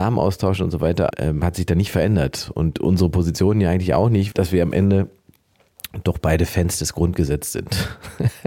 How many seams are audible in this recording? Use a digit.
2